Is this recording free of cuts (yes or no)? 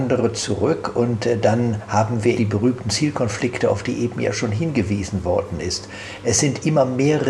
no